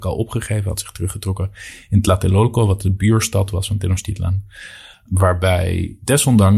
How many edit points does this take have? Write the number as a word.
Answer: one